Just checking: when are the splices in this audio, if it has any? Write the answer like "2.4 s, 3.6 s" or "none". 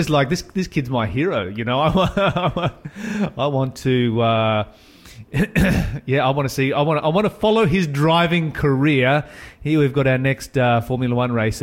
none